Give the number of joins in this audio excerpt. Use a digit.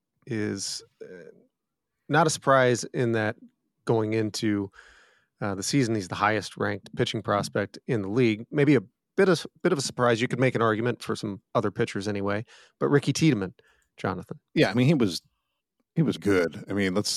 2